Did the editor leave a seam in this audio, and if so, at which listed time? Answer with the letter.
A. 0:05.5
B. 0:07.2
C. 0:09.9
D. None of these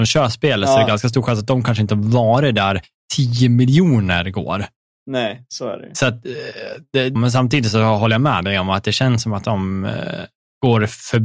B